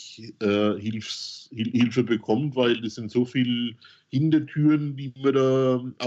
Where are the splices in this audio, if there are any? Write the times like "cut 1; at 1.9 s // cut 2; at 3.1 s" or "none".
none